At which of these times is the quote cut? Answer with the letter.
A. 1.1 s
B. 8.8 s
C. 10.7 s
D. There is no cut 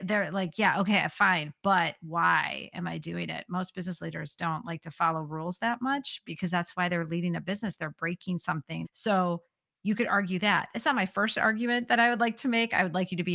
B